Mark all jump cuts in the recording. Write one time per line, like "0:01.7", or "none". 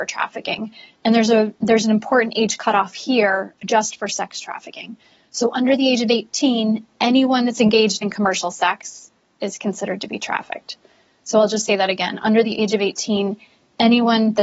none